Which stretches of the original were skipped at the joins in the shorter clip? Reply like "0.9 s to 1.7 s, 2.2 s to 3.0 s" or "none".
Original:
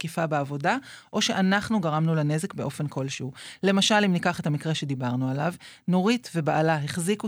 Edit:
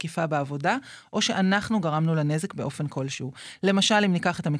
none